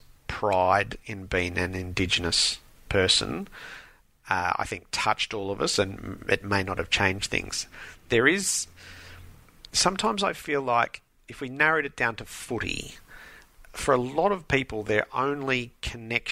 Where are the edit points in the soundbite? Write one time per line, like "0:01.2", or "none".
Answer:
none